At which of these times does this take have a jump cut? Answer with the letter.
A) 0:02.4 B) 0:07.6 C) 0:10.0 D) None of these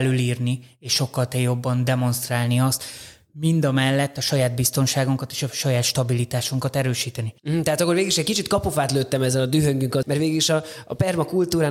C